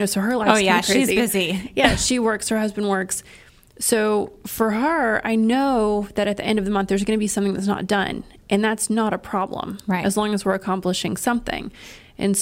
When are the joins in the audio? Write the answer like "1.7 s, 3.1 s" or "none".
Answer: none